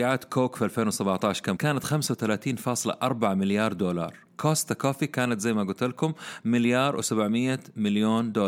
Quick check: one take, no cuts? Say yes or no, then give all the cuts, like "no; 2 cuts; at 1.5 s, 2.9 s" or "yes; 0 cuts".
no; 1 cut; at 1.6 s